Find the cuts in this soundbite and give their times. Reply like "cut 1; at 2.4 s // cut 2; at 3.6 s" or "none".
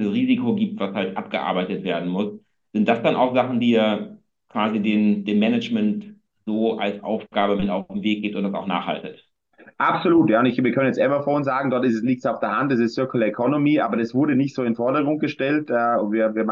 none